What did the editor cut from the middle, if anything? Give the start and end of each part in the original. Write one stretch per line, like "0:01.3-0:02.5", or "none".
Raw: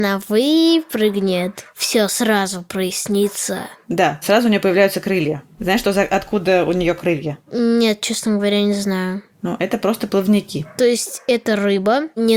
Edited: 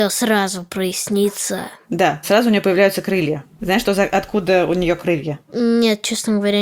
none